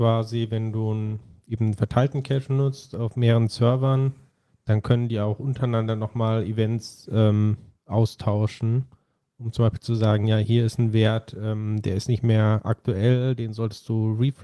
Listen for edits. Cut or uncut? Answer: uncut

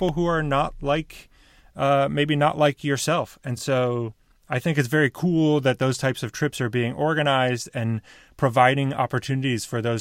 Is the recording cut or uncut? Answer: uncut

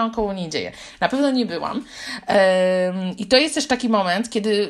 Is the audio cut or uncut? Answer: uncut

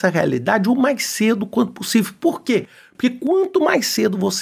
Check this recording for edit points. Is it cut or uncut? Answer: uncut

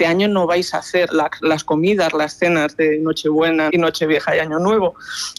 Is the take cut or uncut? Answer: cut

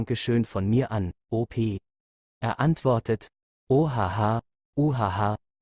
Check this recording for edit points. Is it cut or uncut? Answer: cut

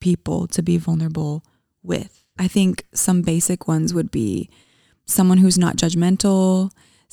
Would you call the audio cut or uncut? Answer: cut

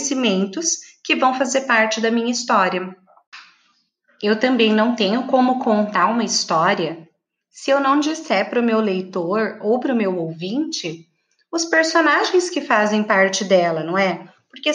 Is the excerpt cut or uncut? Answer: uncut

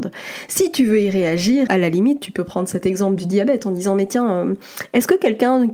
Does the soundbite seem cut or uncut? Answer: cut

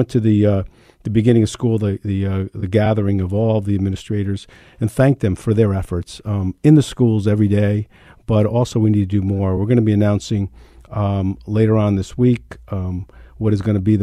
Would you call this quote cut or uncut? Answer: uncut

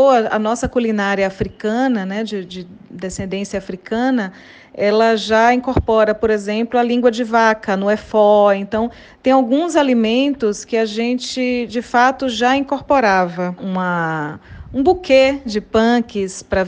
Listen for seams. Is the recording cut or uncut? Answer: cut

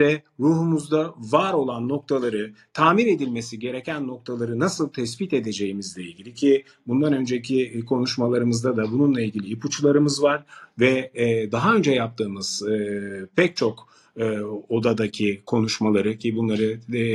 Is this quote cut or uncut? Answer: uncut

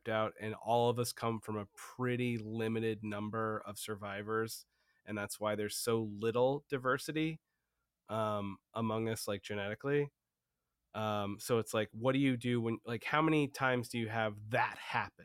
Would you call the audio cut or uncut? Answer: uncut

